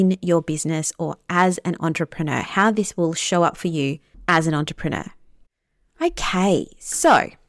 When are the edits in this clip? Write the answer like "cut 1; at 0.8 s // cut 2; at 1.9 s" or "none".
none